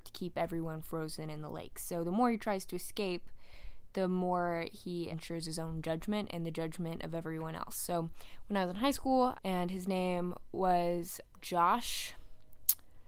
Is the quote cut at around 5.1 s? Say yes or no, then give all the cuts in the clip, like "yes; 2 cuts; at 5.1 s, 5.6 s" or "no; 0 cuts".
yes; 3 cuts; at 5.1 s, 9.4 s, 11.3 s